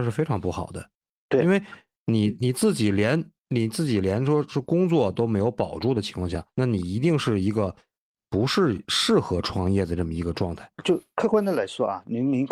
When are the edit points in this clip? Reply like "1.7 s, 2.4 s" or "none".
6.5 s, 10.7 s